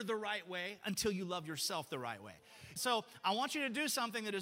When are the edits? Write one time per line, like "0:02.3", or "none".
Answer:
0:02.8